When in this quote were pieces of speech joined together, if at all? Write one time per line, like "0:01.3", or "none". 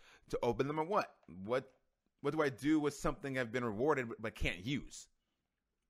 none